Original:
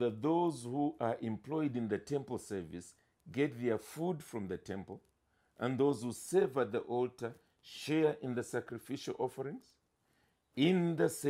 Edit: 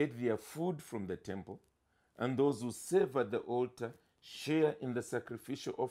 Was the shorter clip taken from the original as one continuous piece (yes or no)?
yes